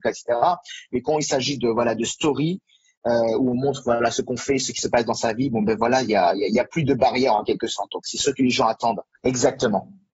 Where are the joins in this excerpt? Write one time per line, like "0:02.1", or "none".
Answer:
0:09.2